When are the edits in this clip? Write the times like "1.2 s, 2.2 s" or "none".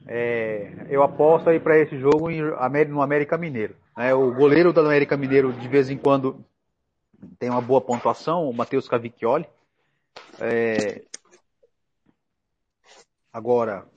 3.9 s